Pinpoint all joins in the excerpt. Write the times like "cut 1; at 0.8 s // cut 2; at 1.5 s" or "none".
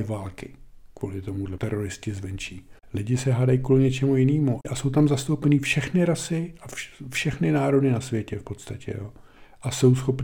cut 1; at 1.6 s